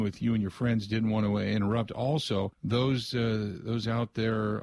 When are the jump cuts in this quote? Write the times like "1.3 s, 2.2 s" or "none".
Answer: 2.5 s